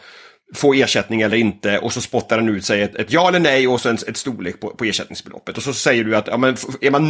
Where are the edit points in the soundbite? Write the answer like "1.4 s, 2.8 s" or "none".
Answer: none